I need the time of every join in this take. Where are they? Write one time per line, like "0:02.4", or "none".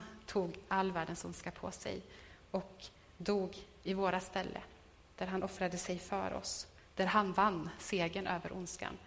none